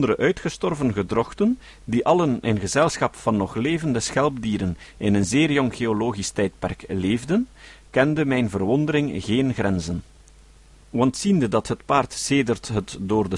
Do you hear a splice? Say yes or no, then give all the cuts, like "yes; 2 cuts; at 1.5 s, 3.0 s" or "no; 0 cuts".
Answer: no; 0 cuts